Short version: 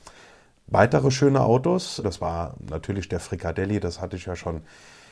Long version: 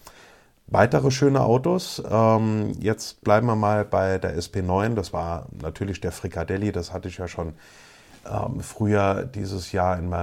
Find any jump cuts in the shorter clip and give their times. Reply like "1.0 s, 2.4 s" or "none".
2.0 s